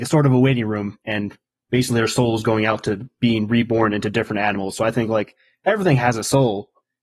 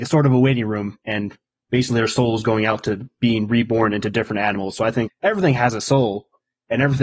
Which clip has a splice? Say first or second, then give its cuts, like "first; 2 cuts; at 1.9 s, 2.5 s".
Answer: second; 1 cut; at 5.1 s